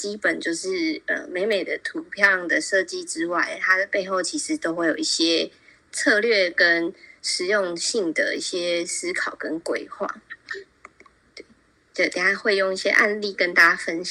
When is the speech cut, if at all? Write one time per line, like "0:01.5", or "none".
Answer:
0:11.2